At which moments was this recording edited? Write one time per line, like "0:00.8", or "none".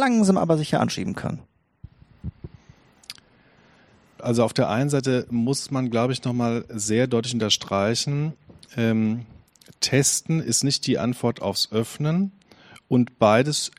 0:04.2